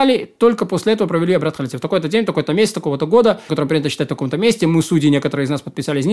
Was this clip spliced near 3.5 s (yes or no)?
yes